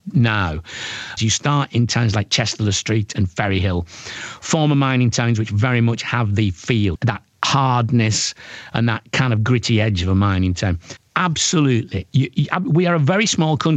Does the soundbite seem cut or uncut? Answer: cut